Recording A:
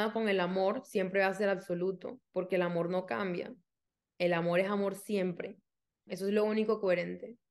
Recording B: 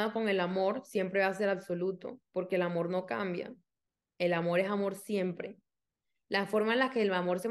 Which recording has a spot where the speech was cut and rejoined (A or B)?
A